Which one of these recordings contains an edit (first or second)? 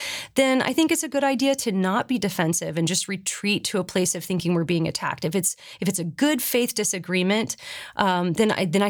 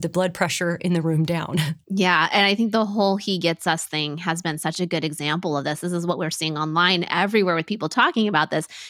second